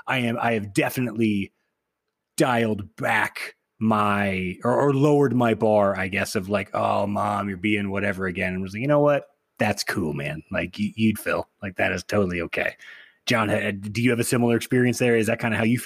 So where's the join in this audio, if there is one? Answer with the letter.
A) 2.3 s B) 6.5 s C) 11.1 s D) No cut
C